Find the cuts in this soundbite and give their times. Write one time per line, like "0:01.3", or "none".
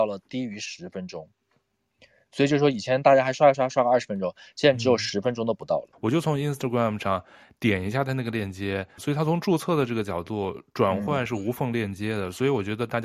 0:03.5
0:05.9
0:09.0